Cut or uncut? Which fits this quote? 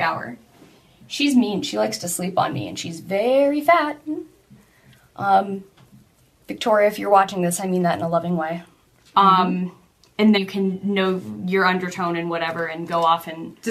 cut